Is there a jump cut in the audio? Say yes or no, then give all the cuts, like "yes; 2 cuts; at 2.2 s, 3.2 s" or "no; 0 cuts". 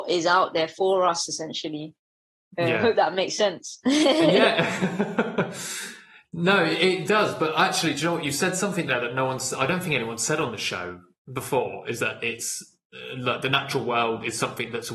no; 0 cuts